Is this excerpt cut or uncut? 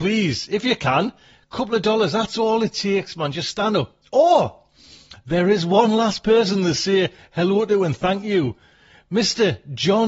uncut